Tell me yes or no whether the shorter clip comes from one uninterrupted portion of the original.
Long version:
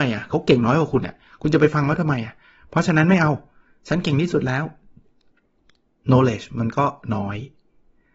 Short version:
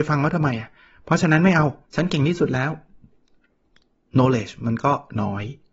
no